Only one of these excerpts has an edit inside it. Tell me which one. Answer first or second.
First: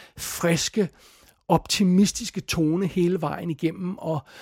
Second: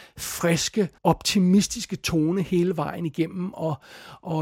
second